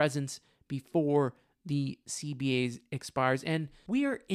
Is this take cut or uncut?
uncut